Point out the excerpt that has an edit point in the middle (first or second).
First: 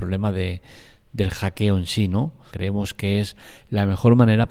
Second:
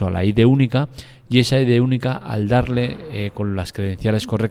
first